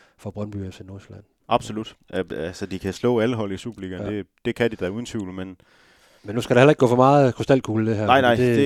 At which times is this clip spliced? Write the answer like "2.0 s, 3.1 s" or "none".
1.4 s

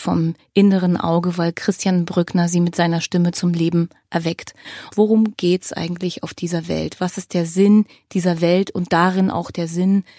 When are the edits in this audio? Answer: 4.9 s

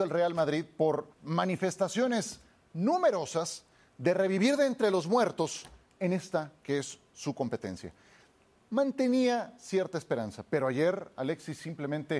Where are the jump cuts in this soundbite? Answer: 1.1 s

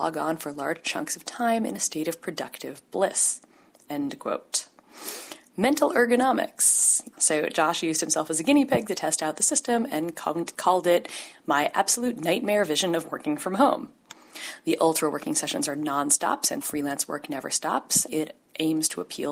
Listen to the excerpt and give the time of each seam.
7.1 s, 16.6 s, 18.1 s

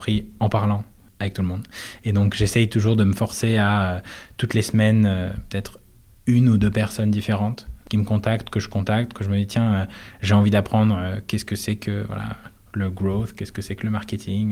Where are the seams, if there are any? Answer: none

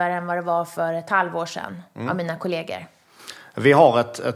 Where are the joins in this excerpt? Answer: none

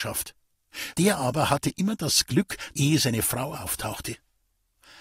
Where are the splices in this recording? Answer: 0.9 s, 2.7 s

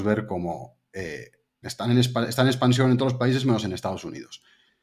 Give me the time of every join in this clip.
1.6 s

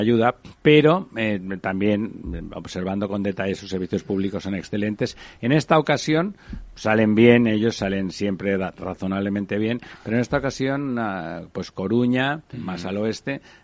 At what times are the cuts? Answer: 12.5 s

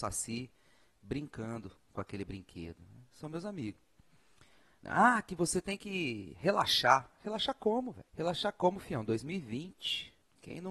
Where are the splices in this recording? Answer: 8.1 s

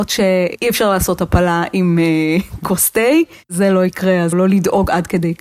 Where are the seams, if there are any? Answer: 4.3 s

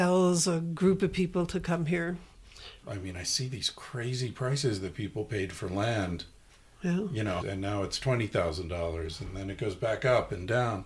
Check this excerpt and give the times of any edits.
2.8 s, 7.4 s

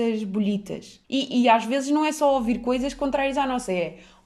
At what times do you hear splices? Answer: 1.0 s

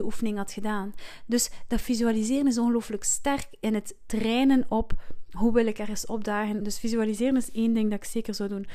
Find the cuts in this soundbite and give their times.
6.6 s

